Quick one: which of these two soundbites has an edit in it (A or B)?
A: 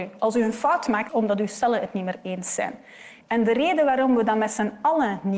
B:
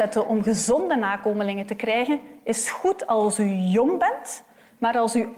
A